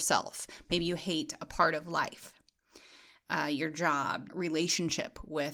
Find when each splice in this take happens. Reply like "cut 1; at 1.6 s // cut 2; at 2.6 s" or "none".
cut 1; at 4.3 s